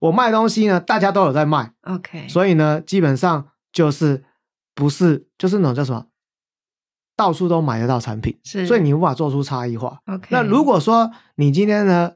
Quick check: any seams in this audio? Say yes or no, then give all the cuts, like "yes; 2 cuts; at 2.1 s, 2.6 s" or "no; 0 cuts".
yes; 1 cut; at 10.0 s